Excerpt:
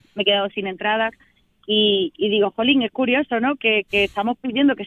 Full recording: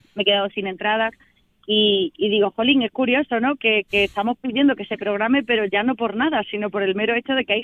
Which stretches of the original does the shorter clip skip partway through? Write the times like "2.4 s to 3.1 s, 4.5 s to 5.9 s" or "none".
none